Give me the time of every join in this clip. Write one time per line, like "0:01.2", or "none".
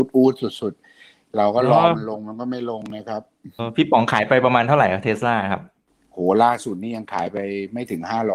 0:03.6